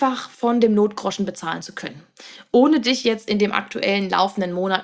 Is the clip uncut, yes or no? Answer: yes